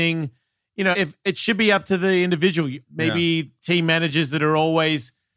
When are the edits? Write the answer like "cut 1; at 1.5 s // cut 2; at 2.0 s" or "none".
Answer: cut 1; at 0.9 s // cut 2; at 2.8 s